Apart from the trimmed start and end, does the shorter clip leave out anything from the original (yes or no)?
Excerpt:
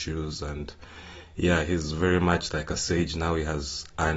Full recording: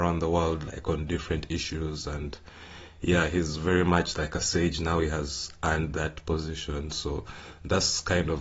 no